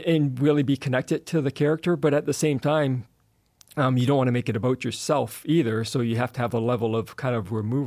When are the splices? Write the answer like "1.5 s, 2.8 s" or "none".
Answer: none